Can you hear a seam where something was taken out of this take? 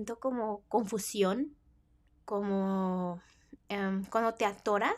no; 0 cuts

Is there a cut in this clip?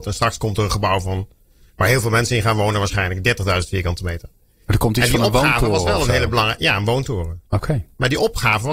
no; 0 cuts

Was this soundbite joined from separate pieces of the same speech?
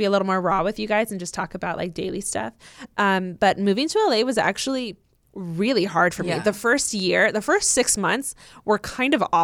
no; 0 cuts

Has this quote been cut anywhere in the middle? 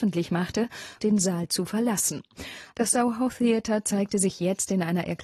yes; 2 cuts; at 1.0 s, 2.7 s

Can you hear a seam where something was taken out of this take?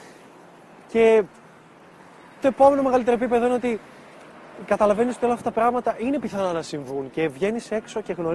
yes; 1 cut; at 2.4 s

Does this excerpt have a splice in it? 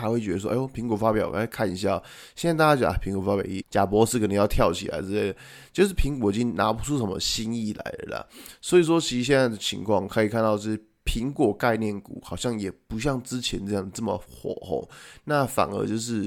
yes; 1 cut; at 3.6 s

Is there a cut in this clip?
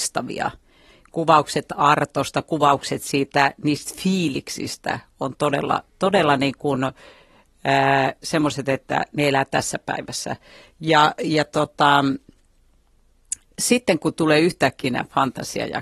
no; 0 cuts

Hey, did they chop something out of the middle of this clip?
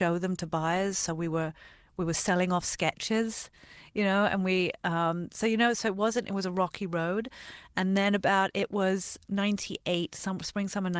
no; 0 cuts

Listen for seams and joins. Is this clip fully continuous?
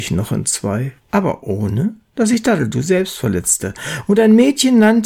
no; 1 cut; at 1.0 s

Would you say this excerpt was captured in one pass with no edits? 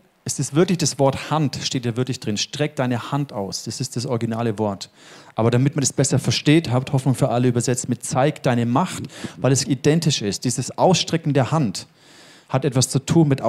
no; 1 cut; at 9.7 s

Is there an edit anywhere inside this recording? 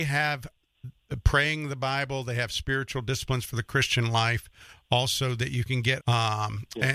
yes; 1 cut; at 6.0 s

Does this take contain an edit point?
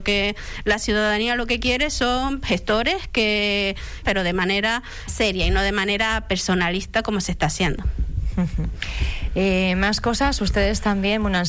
yes; 2 cuts; at 4.0 s, 5.1 s

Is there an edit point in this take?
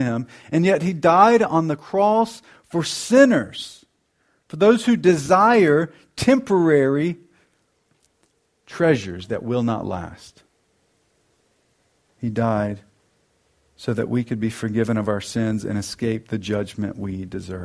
no; 0 cuts

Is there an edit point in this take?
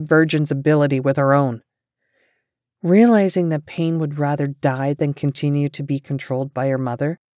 no; 0 cuts

